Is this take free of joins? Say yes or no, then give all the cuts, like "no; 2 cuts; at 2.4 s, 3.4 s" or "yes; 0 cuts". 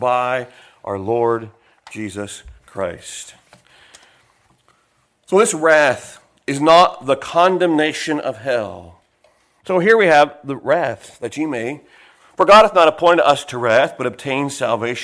no; 1 cut; at 9.6 s